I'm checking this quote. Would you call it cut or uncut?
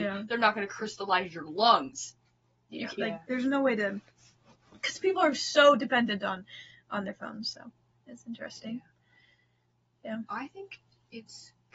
cut